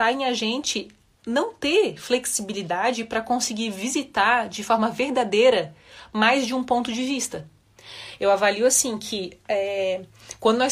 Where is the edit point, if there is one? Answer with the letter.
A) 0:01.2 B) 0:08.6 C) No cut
A